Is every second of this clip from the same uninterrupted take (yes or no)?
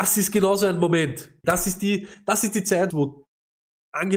no